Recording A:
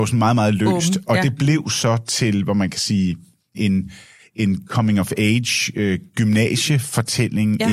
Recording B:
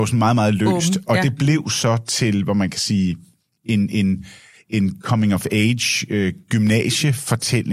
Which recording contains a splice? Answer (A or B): A